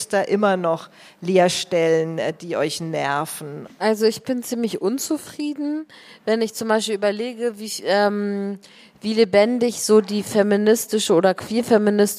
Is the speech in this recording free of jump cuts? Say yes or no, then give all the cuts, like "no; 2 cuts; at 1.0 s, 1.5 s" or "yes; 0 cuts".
no; 1 cut; at 3.6 s